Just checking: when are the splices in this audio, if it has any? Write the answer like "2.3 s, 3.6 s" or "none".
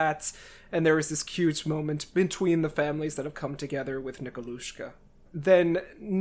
5.3 s